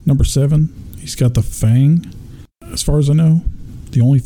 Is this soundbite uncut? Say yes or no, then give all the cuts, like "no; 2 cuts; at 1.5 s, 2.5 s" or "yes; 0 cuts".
yes; 0 cuts